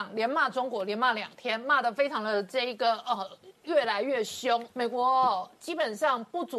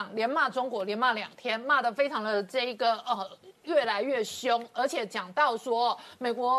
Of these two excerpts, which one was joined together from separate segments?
first; 1 cut; at 4.7 s

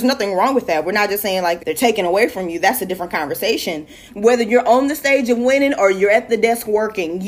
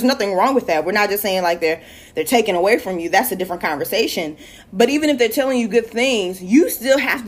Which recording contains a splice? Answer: first; 2 cuts; at 1.6 s, 4.1 s

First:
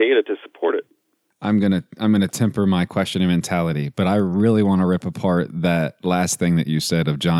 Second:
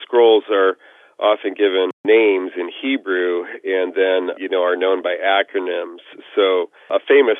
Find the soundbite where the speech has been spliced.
second; 1 cut; at 4.3 s

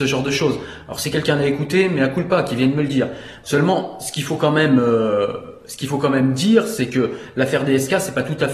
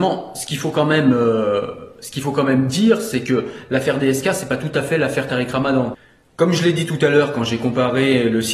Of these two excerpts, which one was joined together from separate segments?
first; 1 cut; at 3.4 s

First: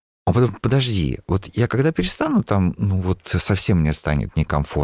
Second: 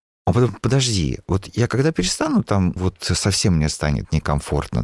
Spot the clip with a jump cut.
second; 1 cut; at 2.8 s

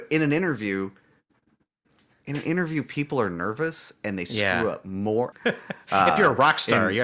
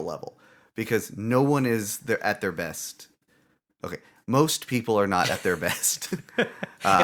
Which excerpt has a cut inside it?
first; 1 cut; at 5.3 s

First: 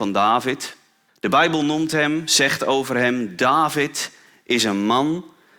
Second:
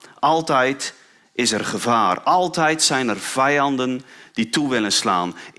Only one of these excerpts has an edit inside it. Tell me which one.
first; 1 cut; at 1.1 s

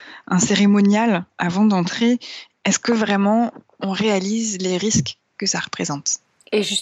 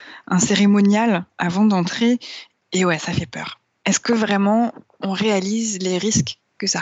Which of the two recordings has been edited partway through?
first; 1 cut; at 2.6 s

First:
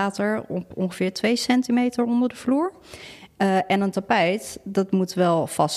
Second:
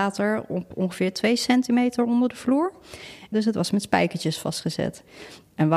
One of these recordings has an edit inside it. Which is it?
second; 1 cut; at 3.3 s

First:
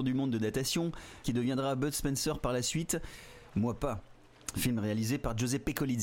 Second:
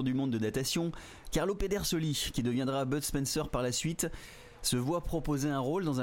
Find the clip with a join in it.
first; 2 cuts; at 1.2 s, 3.5 s

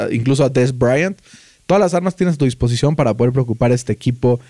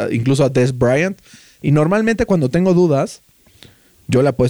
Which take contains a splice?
second; 1 cut; at 1.6 s

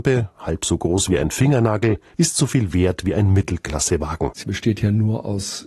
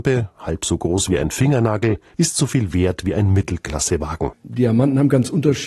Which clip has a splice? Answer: second; 1 cut; at 4.3 s

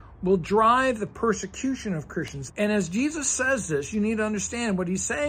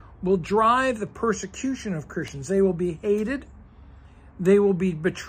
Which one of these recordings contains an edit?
first; 1 cut; at 2.5 s

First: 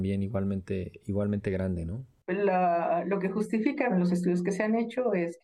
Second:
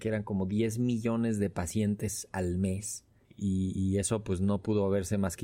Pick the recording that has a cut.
first; 2 cuts; at 2.2 s, 3.9 s

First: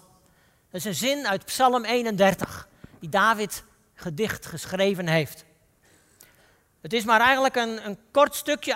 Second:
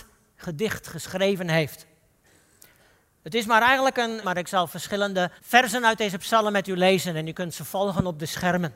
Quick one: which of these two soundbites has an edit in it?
second; 2 cuts; at 4.2 s, 5.4 s

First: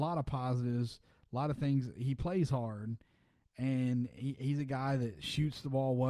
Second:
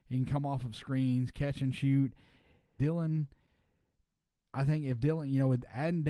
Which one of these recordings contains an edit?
second; 1 cut; at 2.8 s

